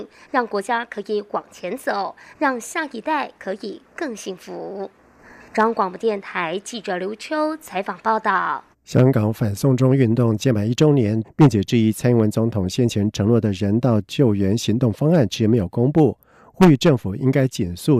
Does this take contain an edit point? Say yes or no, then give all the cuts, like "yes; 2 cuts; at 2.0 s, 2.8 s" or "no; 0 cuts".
yes; 3 cuts; at 8.7 s, 11.2 s, 15.3 s